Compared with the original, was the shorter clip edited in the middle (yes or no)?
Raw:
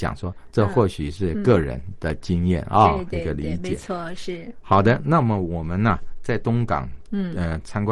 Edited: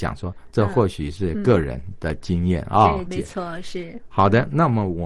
yes